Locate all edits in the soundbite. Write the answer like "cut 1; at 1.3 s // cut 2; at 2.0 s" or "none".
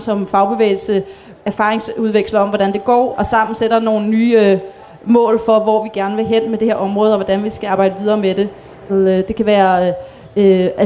cut 1; at 3.1 s // cut 2; at 8.9 s